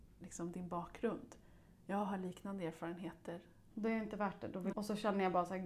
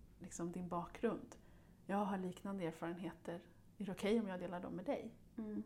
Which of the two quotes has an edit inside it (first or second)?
first